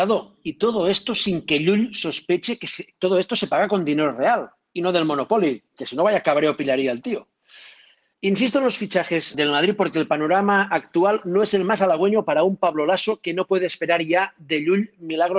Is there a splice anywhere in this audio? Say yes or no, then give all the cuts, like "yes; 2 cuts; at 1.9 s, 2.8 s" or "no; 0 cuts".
yes; 1 cut; at 9.3 s